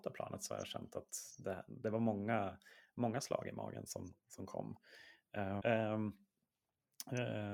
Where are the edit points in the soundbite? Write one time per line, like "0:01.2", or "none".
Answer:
0:05.6